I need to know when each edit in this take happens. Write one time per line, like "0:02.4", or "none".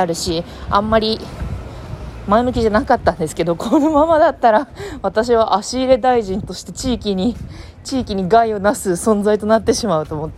none